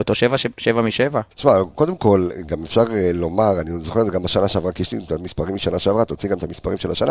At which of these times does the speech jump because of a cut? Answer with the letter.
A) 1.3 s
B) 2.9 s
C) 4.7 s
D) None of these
A